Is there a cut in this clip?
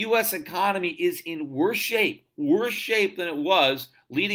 no; 0 cuts

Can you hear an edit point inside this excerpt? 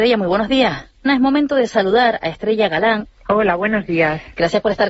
yes; 2 cuts; at 1.1 s, 3.1 s

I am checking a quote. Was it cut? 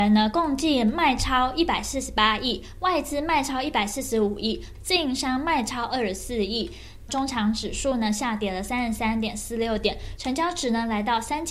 yes; 3 cuts; at 4.7 s, 7.1 s, 10.2 s

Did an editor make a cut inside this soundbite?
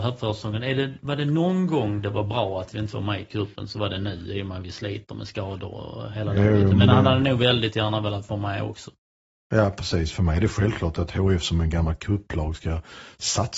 no; 0 cuts

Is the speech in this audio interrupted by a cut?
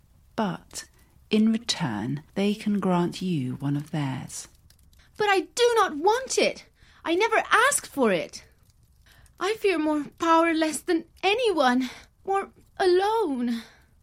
yes; 1 cut; at 2.3 s

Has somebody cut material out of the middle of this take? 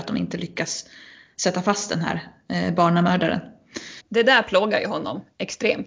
yes; 1 cut; at 4.0 s

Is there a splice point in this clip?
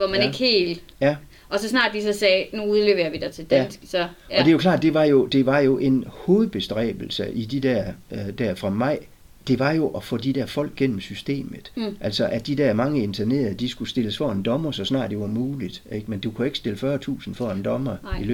no; 0 cuts

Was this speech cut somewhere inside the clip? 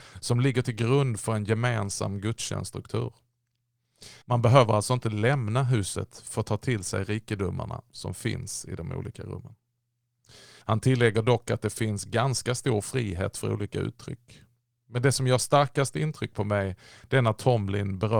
yes; 2 cuts; at 4.2 s, 10.6 s

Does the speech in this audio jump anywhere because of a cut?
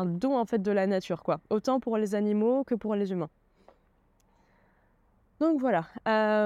no; 0 cuts

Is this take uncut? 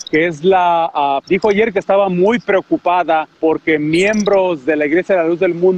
no; 2 cuts; at 1.2 s, 3.3 s

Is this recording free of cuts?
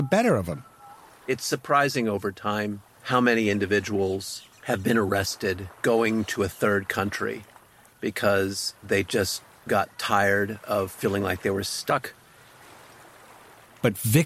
yes; 0 cuts

